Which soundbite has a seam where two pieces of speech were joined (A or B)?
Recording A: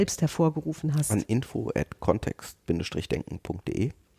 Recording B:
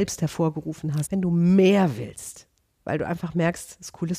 B